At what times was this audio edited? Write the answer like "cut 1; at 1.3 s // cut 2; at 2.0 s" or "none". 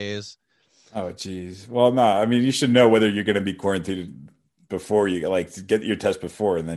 none